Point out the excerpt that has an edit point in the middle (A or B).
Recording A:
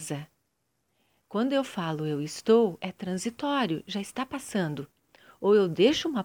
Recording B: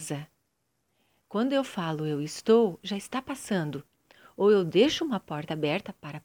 B